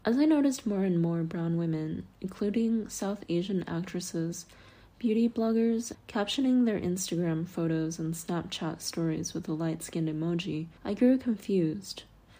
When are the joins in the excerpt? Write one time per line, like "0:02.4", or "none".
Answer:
0:05.9
0:10.8